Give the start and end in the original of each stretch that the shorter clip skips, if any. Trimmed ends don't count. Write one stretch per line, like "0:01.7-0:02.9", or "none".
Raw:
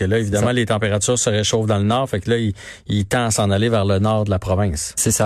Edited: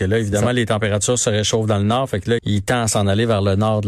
0:02.4-0:02.8